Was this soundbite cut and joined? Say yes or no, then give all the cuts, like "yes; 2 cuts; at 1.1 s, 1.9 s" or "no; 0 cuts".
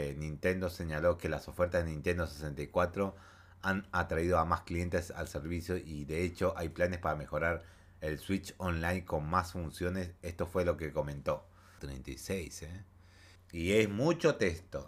yes; 2 cuts; at 11.8 s, 13.4 s